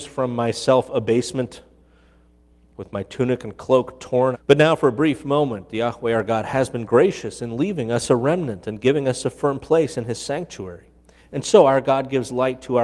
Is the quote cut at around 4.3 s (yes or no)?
yes